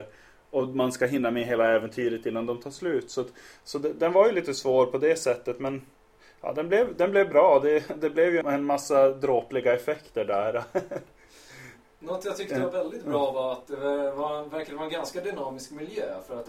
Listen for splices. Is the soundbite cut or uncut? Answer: cut